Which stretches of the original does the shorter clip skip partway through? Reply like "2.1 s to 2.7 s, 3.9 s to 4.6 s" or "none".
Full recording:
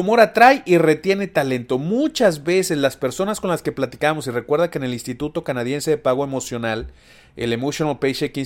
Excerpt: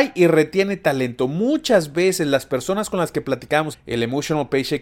4.2 s to 7.2 s